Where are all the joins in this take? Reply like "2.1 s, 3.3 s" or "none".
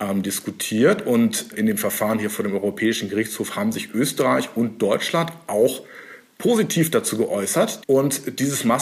1.5 s, 7.8 s